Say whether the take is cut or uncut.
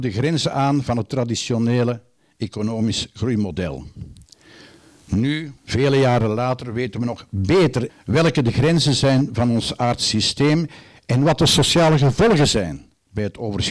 cut